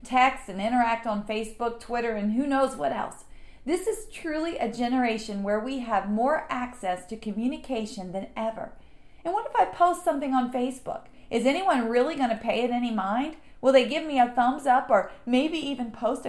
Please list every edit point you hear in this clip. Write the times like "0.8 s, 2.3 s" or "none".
9.2 s